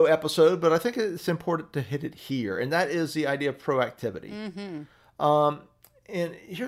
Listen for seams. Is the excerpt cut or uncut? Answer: uncut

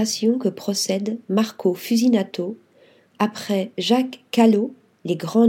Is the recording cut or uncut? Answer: uncut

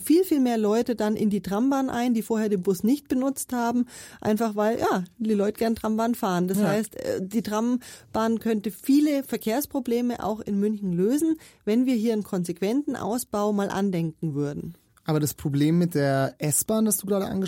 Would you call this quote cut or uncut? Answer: uncut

